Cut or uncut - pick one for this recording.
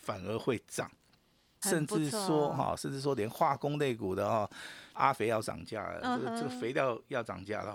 cut